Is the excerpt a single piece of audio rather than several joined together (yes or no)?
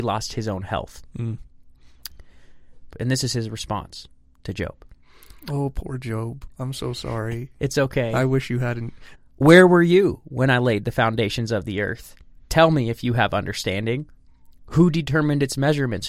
no